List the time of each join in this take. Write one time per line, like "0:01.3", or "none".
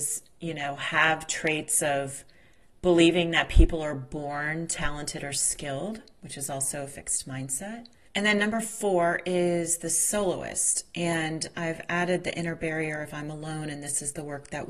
0:08.1